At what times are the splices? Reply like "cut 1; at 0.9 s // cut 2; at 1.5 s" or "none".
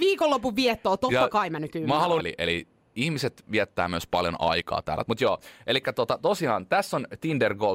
cut 1; at 2.2 s // cut 2; at 5.0 s